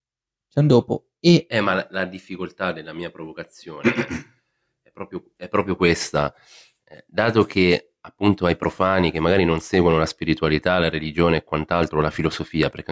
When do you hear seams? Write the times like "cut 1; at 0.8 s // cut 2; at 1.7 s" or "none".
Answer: none